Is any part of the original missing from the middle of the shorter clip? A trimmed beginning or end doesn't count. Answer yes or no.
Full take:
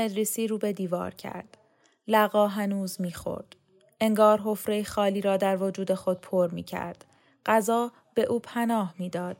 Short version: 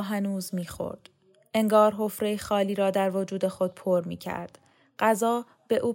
no